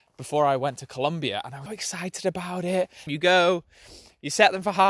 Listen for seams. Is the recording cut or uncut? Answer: cut